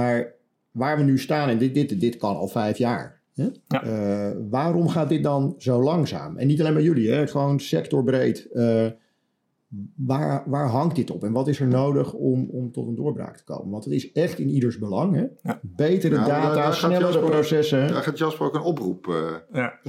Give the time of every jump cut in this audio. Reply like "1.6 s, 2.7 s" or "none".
none